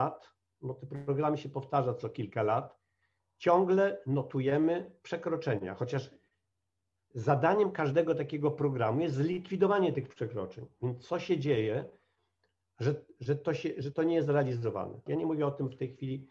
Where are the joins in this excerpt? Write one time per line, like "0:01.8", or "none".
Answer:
0:15.1